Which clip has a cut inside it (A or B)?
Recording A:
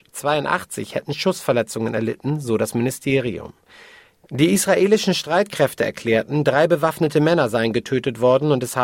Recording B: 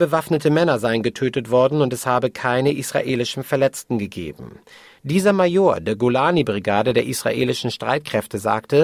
B